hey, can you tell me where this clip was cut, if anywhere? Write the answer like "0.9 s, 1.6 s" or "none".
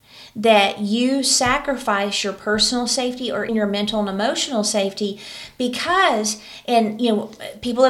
3.5 s

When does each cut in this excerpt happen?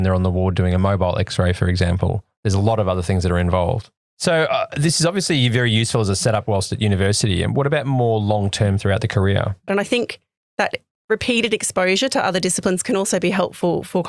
4.0 s, 9.7 s

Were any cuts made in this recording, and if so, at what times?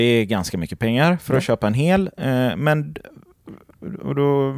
none

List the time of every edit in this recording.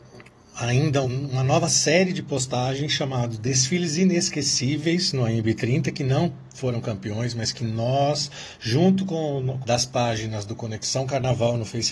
1.0 s, 9.6 s

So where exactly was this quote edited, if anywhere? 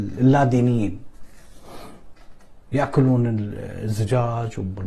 2.6 s

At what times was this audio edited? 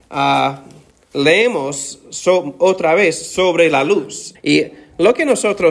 4.3 s

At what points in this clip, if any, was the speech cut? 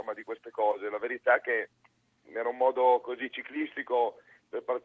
2.3 s

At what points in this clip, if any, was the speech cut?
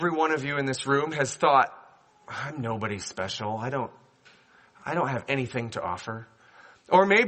none

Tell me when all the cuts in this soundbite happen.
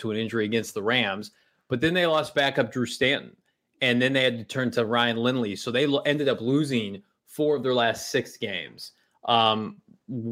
none

